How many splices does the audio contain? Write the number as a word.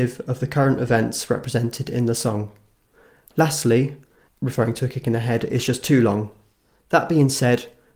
one